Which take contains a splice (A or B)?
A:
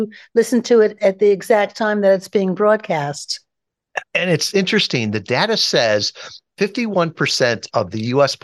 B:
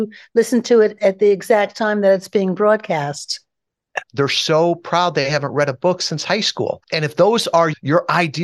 B